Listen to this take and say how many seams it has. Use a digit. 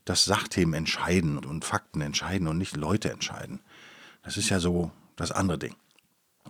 1